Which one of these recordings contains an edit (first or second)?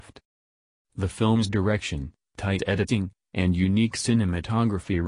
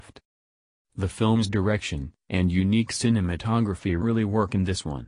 second